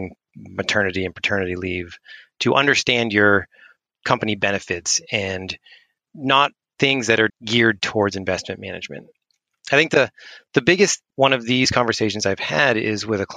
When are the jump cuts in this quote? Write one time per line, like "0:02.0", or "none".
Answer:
0:07.3
0:11.1